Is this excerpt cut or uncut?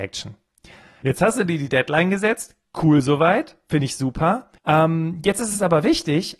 cut